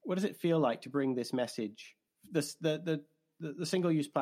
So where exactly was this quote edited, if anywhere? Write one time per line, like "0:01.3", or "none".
none